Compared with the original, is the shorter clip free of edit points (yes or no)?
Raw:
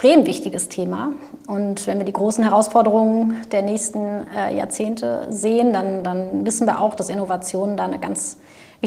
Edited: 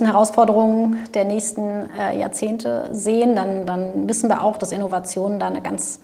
yes